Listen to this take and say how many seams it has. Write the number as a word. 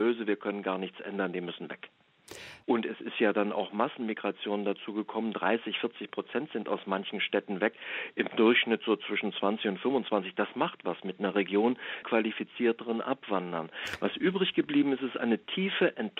two